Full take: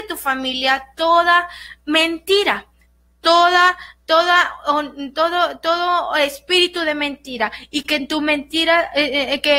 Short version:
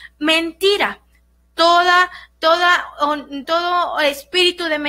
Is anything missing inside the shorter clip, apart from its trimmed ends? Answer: yes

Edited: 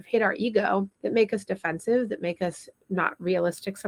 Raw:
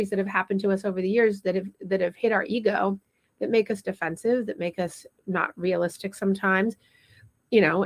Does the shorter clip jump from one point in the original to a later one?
yes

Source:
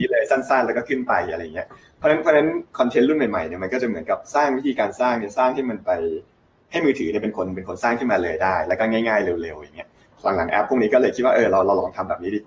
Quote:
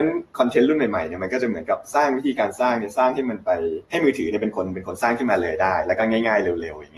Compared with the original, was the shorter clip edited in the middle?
yes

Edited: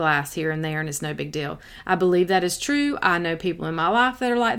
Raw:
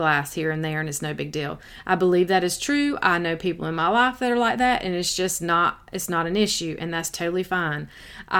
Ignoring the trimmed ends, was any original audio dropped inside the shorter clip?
no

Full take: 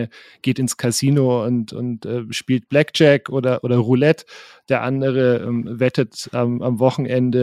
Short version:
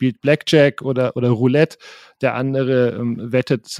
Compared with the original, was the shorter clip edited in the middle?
no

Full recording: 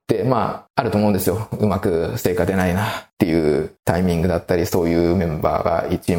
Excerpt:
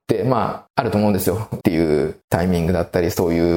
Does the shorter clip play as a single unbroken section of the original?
no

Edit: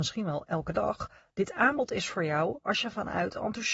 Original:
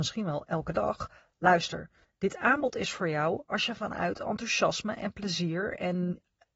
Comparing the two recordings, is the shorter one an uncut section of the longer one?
no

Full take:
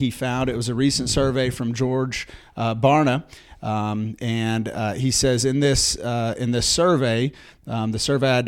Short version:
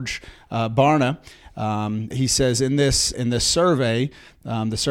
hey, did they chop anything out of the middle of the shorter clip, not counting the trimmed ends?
yes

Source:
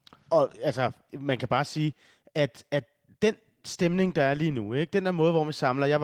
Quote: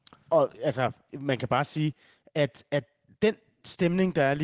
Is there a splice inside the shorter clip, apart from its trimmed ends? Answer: no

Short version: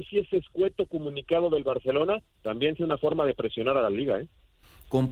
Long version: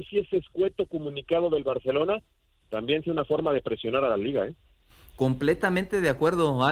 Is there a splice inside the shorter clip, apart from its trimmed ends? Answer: yes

